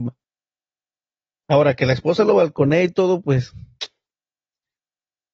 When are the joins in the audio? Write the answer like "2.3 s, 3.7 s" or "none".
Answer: 1.4 s